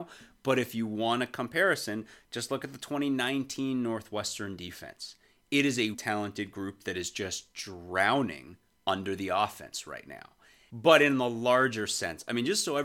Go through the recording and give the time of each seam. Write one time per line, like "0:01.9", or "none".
0:05.9
0:10.7